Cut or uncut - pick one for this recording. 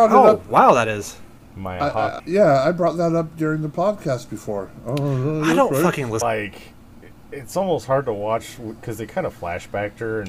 cut